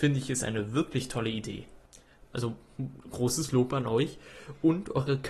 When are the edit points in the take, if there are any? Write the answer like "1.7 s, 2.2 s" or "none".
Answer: 2.3 s